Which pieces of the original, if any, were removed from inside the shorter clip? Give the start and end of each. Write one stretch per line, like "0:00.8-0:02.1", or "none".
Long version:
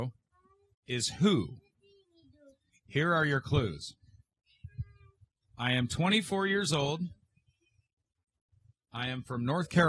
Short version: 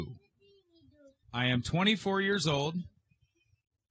0:02.6-0:05.5